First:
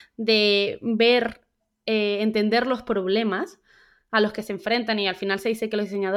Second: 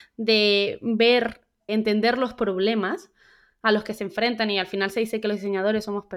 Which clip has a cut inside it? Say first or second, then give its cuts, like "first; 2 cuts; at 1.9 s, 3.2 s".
second; 1 cut; at 1.7 s